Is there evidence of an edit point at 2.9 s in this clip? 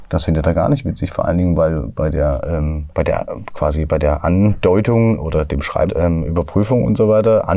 yes; 2 cuts; at 2.9 s, 5.9 s

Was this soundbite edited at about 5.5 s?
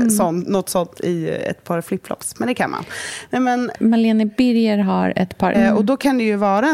yes; 2 cuts; at 3.7 s, 5.5 s

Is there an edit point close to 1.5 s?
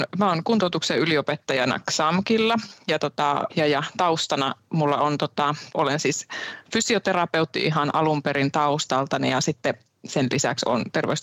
no; 2 cuts; at 3.5 s, 5.7 s

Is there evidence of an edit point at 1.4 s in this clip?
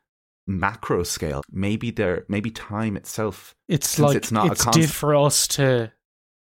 yes; 2 cuts; at 1.4 s, 4.9 s

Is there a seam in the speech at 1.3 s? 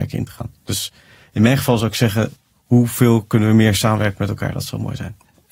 no; 0 cuts

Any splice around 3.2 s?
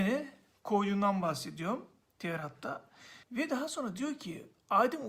yes; 1 cut; at 3.2 s

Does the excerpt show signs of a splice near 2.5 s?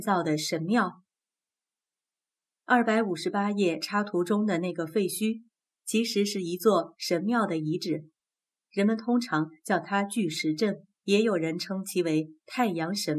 no; 2 cuts; at 8.5 s, 10.9 s

